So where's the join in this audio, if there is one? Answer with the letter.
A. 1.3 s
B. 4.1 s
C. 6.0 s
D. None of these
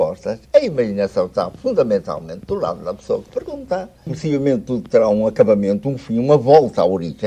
B